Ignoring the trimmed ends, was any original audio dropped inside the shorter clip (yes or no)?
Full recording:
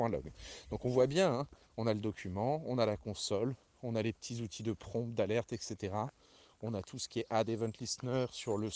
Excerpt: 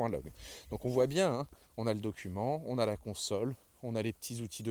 no